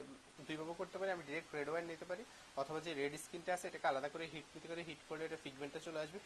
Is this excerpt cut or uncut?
uncut